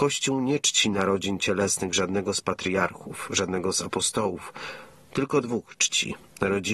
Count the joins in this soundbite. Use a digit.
0